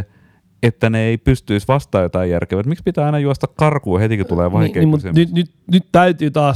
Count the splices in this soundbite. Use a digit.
0